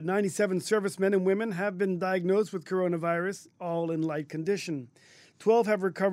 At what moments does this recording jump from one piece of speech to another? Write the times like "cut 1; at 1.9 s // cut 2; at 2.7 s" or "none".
none